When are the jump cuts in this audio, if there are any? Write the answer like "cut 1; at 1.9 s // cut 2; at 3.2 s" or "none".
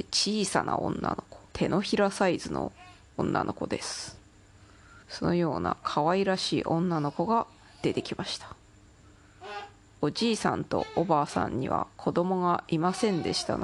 cut 1; at 1.5 s // cut 2; at 5.0 s